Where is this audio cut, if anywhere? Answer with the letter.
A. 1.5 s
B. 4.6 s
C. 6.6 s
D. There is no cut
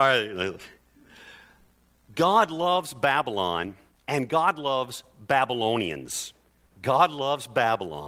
D